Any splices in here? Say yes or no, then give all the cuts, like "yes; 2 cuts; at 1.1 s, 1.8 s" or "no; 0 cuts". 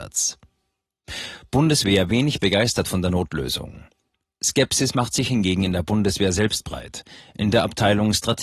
no; 0 cuts